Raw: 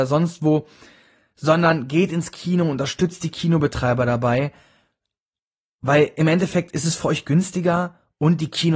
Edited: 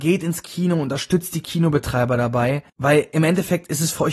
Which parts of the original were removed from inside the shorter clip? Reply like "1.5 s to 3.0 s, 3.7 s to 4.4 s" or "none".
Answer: 4.6 s to 5.7 s